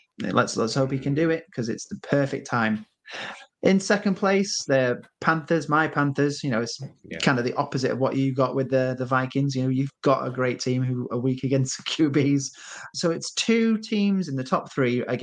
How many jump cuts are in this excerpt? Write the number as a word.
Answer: one